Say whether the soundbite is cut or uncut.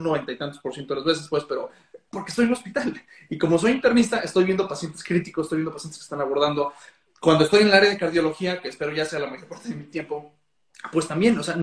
uncut